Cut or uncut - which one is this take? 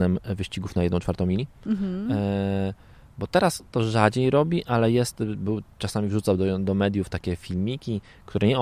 uncut